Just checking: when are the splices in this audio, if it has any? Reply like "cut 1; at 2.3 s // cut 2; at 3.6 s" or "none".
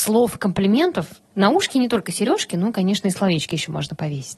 none